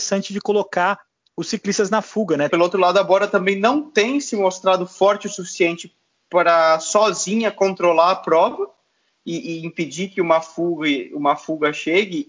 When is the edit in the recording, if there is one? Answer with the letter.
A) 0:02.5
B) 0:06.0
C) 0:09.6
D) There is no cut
A